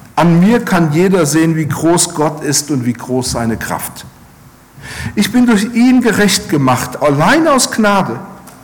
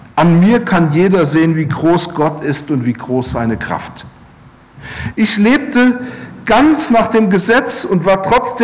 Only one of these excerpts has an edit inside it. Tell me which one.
second; 1 cut; at 5.1 s

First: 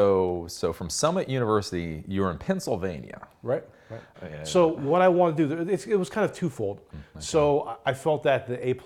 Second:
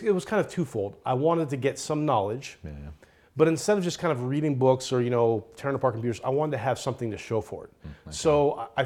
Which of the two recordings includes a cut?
first; 2 cuts; at 4.1 s, 6.9 s

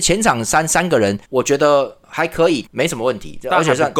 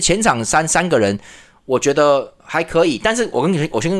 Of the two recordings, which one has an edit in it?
first; 2 cuts; at 1.2 s, 2.6 s

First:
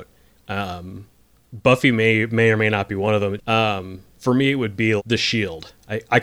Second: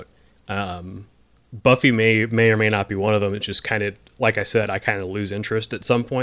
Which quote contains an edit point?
first; 2 cuts; at 3.4 s, 5.0 s

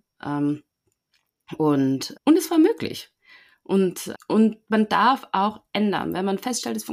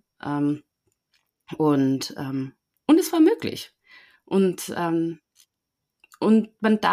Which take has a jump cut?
first; 2 cuts; at 2.1 s, 4.1 s

